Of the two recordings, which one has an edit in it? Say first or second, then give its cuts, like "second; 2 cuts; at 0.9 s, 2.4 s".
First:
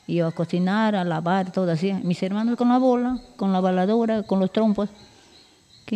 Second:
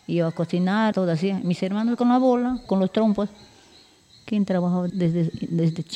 second; 3 cuts; at 0.9 s, 2.7 s, 4.9 s